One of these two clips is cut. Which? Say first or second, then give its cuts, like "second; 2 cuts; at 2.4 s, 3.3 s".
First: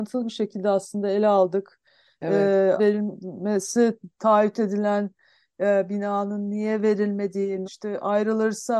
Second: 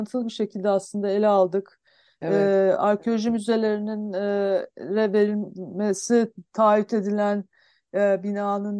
first; 2 cuts; at 2.8 s, 7.6 s